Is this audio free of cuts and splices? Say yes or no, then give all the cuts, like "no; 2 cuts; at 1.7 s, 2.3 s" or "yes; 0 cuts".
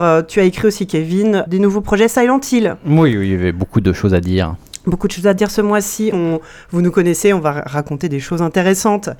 no; 2 cuts; at 1.5 s, 6.1 s